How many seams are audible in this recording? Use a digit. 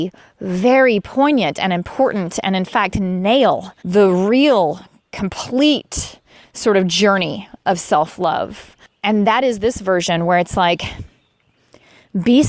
1